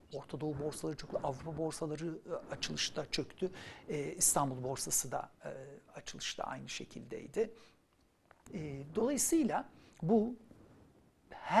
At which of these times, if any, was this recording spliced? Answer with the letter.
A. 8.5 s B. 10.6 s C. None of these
A